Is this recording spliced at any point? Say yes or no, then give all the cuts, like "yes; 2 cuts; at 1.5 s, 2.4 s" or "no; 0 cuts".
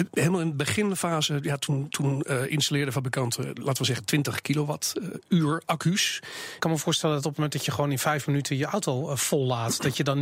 yes; 1 cut; at 6.6 s